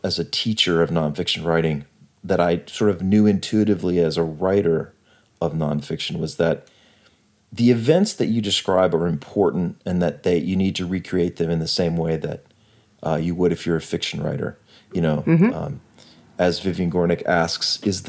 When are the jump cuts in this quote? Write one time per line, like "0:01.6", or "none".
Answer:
none